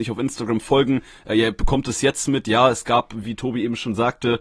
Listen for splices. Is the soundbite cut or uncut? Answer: uncut